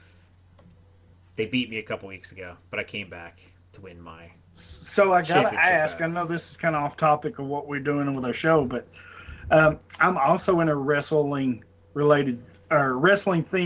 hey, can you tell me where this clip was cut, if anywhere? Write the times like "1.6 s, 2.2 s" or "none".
none